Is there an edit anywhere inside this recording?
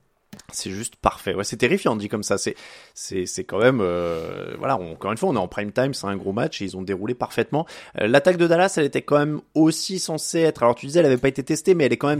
no; 0 cuts

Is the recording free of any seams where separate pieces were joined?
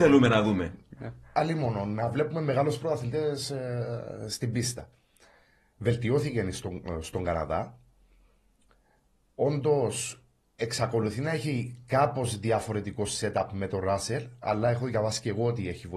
yes; 0 cuts

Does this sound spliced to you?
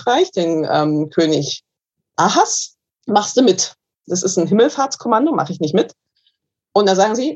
yes; 1 cut; at 4.0 s

